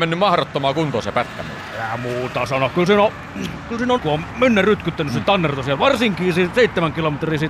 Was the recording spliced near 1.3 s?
no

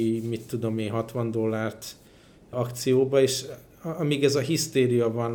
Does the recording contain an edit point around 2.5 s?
yes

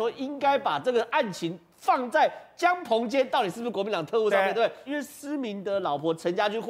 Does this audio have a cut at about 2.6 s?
no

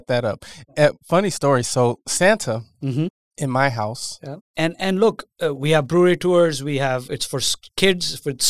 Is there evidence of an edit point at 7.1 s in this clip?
yes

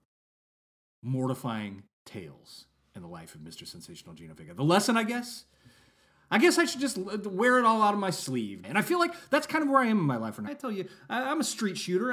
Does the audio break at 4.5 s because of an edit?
no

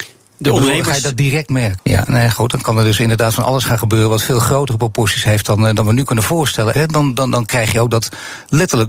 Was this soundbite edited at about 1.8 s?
yes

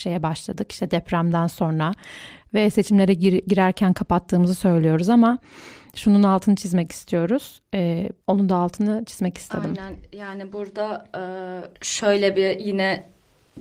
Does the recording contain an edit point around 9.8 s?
no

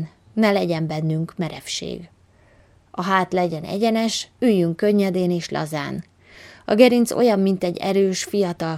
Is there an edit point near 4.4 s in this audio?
yes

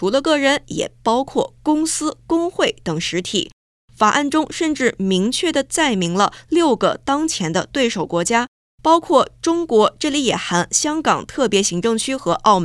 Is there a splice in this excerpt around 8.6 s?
no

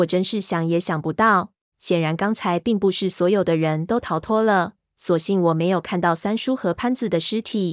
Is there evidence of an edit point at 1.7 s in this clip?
yes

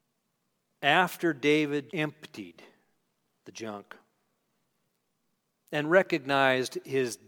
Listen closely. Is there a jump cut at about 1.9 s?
yes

